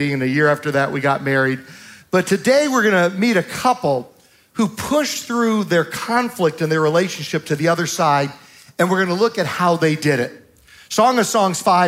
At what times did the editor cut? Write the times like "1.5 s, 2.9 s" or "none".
none